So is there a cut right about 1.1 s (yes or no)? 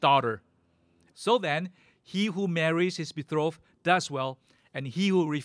yes